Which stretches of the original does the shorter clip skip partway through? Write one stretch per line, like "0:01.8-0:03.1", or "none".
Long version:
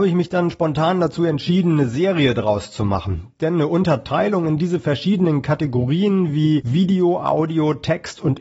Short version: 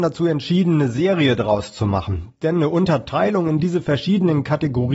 none